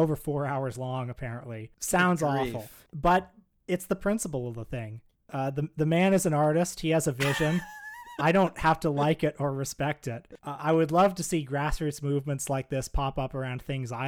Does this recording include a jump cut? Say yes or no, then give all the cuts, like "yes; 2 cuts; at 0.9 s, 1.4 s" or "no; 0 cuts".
no; 0 cuts